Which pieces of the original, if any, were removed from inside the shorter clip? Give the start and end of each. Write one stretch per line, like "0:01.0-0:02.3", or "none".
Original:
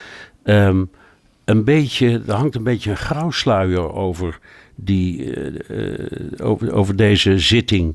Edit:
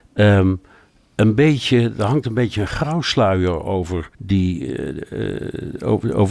0:04.4-0:04.7